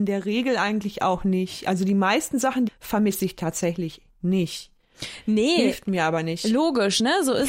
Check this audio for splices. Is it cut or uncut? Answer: cut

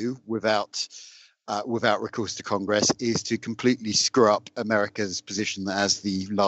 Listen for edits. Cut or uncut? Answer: uncut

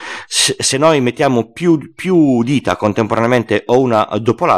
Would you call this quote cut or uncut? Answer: uncut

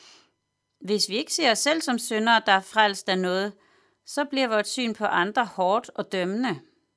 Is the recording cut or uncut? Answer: uncut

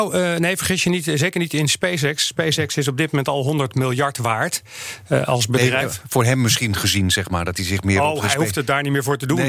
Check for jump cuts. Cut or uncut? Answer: uncut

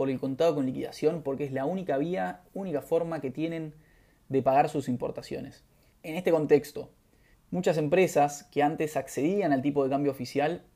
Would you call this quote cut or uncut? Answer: cut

